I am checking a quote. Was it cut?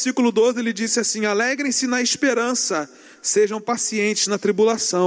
no; 0 cuts

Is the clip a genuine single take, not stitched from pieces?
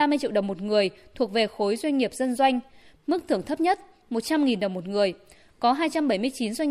yes; 0 cuts

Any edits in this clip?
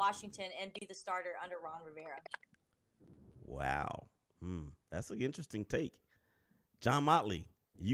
no; 0 cuts

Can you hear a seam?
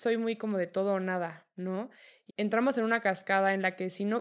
yes; 1 cut; at 2.3 s

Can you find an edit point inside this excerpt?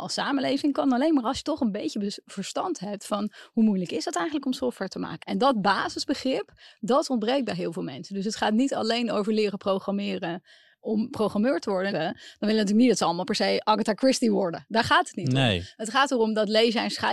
yes; 2 cuts; at 5.2 s, 11.9 s

